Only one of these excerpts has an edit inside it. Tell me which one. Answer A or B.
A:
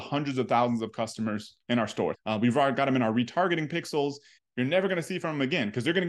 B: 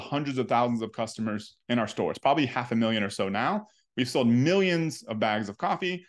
A